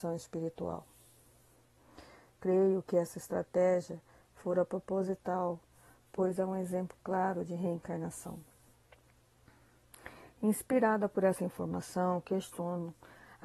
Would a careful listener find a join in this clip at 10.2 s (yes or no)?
no